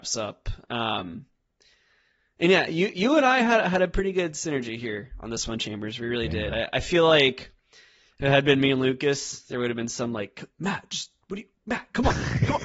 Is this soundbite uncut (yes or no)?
yes